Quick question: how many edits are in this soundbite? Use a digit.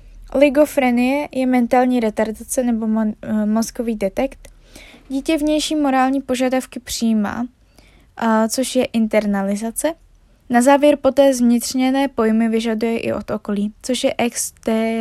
2